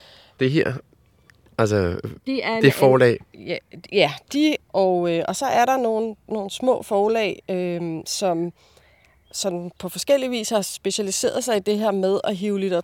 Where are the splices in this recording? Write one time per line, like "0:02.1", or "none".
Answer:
0:04.6